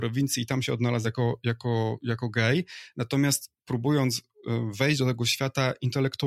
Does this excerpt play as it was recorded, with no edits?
yes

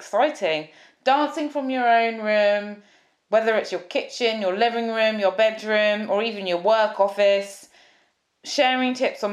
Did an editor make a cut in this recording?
no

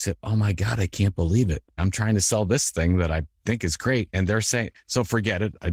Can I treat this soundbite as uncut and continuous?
no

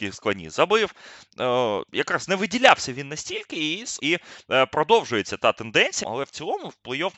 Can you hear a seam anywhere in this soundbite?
yes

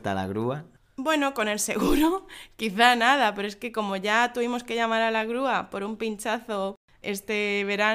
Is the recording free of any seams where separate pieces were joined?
yes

